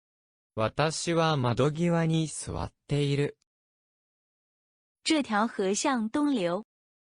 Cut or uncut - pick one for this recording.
cut